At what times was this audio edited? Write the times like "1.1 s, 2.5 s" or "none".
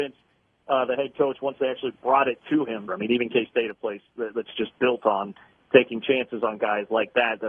2.9 s